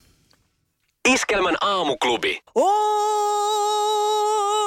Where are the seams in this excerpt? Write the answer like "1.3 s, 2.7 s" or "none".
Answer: 2.5 s

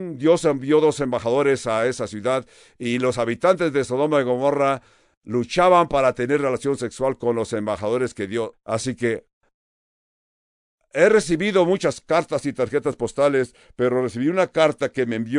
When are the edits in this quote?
8.5 s

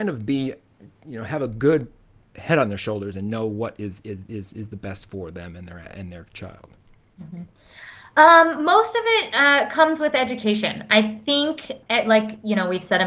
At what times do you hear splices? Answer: 11.8 s

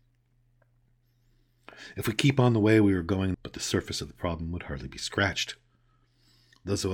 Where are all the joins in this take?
3.3 s

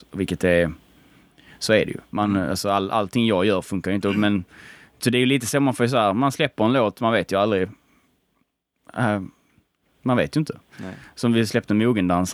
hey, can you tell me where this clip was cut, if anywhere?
none

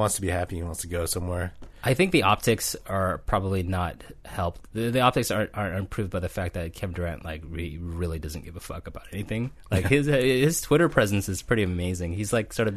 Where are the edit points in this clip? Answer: none

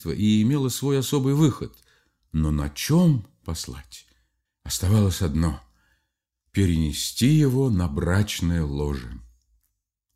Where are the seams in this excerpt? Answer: 4.5 s

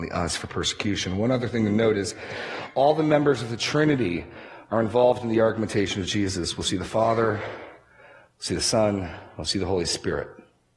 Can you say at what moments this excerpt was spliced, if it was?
none

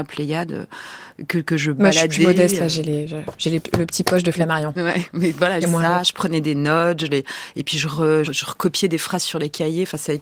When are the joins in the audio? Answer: 5.6 s, 8.2 s

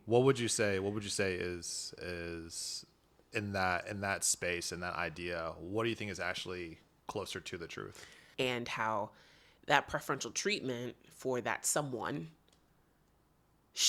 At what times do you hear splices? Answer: 8.3 s

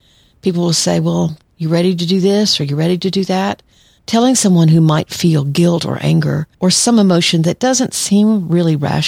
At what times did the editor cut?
1.4 s, 4.0 s, 6.5 s

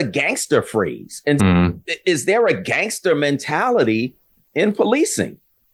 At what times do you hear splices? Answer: 1.4 s

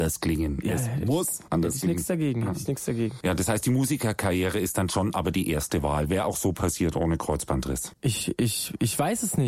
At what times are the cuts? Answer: none

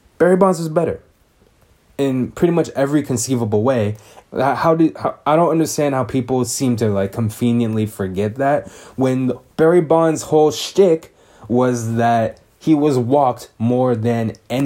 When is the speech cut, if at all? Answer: 4.2 s

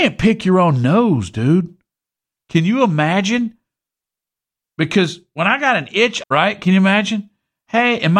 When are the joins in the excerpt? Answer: 6.2 s

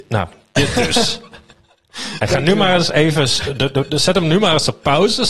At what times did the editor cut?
none

